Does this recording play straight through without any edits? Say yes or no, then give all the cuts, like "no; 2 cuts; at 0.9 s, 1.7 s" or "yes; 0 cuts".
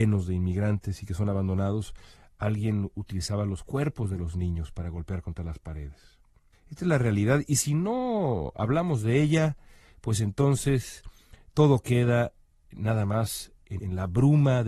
no; 2 cuts; at 6.5 s, 13.8 s